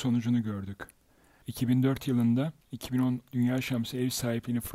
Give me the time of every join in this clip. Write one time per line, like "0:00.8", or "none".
0:01.4
0:02.6